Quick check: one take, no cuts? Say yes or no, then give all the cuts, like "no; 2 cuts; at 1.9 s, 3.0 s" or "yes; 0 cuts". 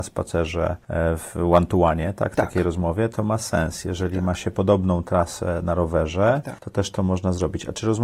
yes; 0 cuts